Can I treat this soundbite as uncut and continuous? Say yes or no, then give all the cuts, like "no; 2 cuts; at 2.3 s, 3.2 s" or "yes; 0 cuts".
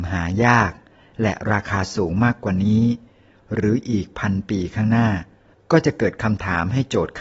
yes; 0 cuts